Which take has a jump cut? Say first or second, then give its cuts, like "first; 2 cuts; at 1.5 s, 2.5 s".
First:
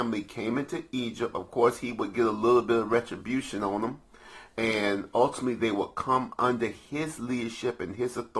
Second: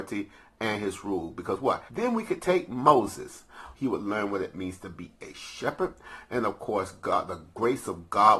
second; 2 cuts; at 1.9 s, 3.7 s